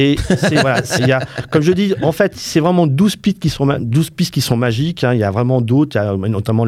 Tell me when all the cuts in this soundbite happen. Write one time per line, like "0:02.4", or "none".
0:01.0